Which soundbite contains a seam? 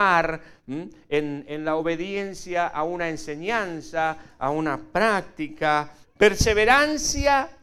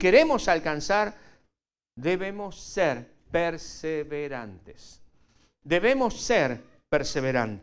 first; 1 cut; at 6.0 s

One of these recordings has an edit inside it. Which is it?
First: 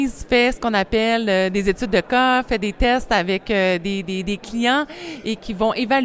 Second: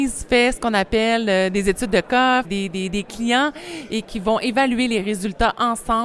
second; 1 cut; at 2.4 s

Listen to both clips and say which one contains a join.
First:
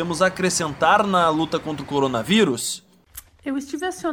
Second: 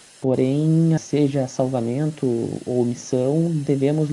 second; 1 cut; at 1.0 s

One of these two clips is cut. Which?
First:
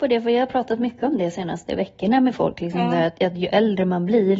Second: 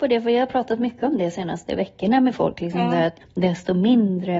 second; 1 cut; at 3.2 s

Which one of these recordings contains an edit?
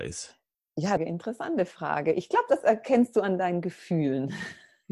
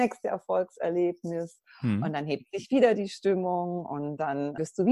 first; 1 cut; at 1.0 s

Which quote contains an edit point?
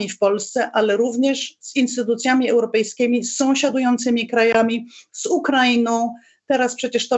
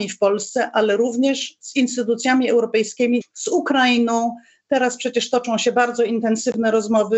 second; 1 cut; at 3.2 s

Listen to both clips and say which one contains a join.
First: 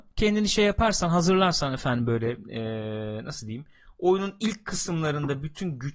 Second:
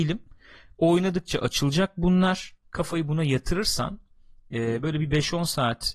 second; 1 cut; at 2.6 s

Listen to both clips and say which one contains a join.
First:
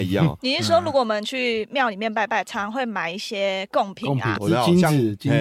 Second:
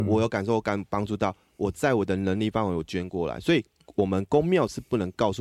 first; 1 cut; at 4.3 s

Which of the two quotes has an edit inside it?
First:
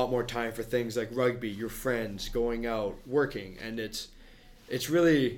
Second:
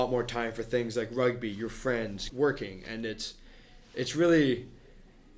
second; 1 cut; at 2.3 s

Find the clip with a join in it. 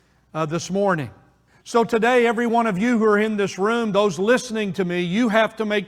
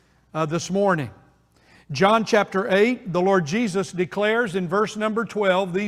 first; 1 cut; at 1.5 s

